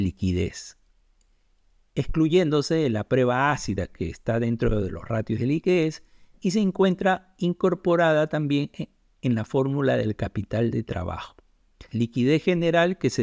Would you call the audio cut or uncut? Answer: cut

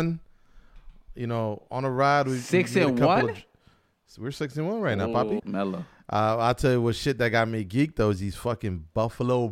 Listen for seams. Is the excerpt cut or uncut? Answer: cut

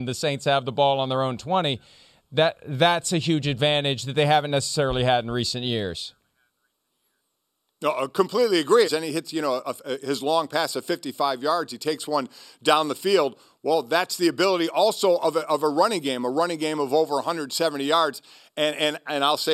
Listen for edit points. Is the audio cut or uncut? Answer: cut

